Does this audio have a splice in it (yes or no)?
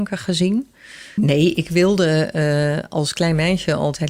yes